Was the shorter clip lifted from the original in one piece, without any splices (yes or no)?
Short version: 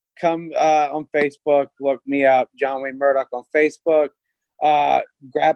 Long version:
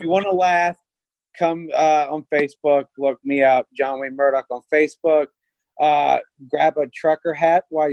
yes